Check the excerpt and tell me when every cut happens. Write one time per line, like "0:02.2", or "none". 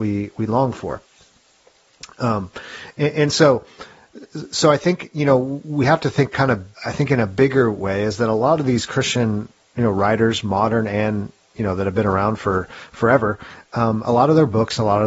0:06.7